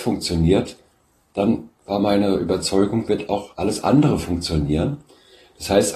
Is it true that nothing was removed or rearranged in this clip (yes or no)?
yes